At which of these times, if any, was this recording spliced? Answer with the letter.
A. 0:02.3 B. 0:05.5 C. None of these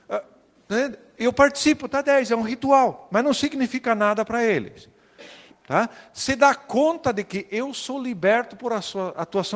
B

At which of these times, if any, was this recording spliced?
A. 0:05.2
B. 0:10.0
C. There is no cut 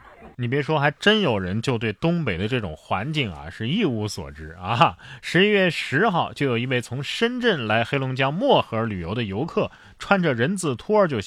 C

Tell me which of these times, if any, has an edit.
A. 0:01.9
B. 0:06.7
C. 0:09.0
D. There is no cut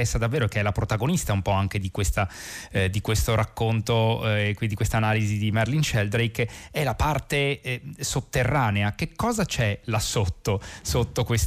D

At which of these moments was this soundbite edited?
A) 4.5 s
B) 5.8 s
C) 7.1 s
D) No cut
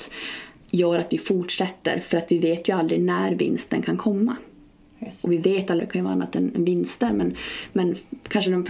B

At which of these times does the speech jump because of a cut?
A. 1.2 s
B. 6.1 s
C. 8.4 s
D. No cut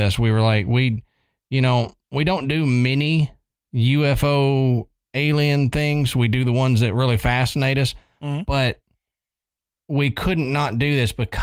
D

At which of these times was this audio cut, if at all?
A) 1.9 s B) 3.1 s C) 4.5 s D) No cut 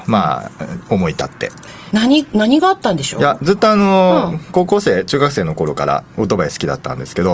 A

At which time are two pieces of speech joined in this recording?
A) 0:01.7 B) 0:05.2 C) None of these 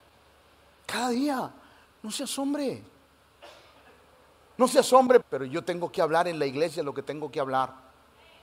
B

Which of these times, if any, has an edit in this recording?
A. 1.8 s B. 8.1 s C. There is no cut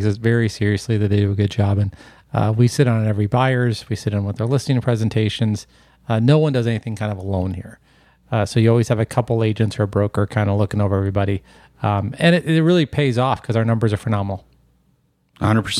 C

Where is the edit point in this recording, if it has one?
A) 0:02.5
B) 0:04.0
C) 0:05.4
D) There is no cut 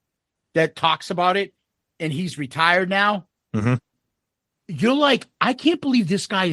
D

